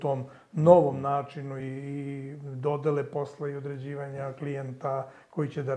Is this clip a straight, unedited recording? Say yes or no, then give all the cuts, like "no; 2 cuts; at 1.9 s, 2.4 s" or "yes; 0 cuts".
no; 1 cut; at 1.6 s